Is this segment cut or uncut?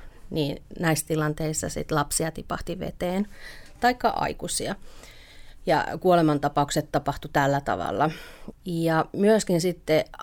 cut